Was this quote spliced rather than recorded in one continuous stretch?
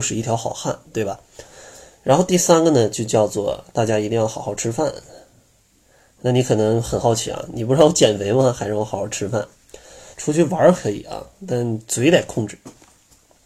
yes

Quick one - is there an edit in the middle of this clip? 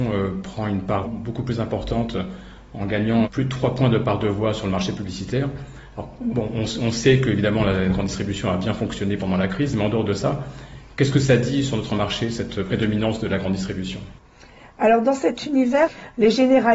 yes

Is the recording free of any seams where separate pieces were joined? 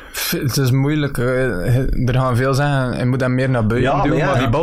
yes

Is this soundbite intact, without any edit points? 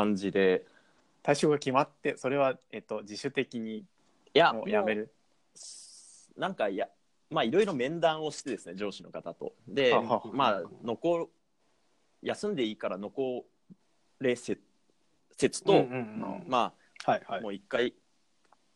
yes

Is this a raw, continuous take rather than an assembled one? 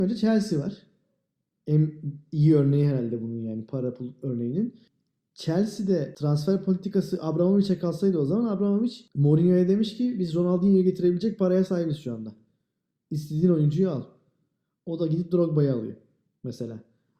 yes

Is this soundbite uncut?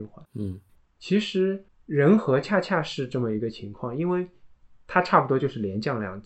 yes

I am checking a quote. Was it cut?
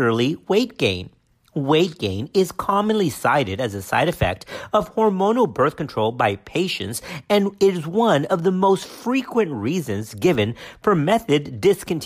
no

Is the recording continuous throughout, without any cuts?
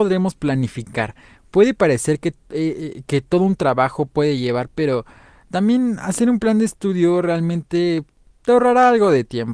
yes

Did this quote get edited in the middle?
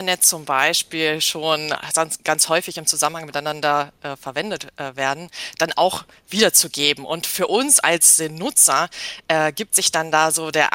no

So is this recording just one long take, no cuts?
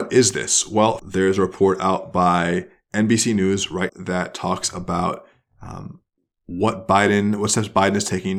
no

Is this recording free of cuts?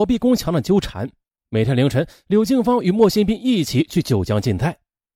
yes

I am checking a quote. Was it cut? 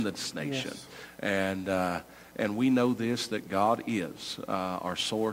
no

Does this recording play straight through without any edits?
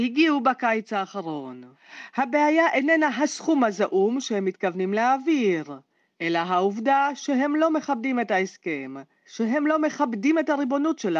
yes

